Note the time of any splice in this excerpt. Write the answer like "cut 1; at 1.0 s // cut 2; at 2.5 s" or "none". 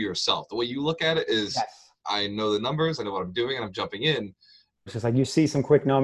cut 1; at 2.0 s // cut 2; at 4.9 s